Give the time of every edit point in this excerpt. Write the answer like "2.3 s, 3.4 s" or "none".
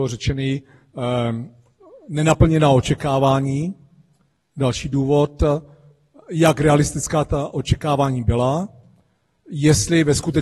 none